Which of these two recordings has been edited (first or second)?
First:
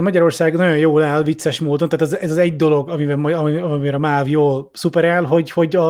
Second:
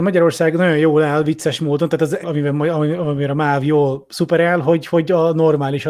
second